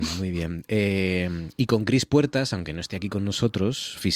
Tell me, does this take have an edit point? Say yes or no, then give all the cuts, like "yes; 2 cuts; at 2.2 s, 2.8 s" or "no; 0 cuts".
no; 0 cuts